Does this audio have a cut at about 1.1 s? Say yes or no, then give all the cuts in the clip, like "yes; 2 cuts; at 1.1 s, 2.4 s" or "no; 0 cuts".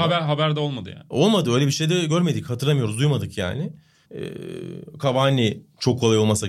no; 1 cut; at 4.0 s